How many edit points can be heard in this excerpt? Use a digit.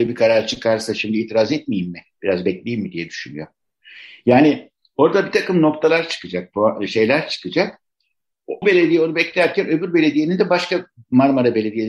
1